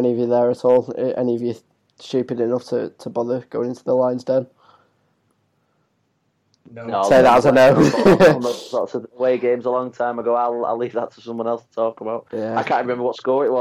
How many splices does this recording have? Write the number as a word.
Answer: zero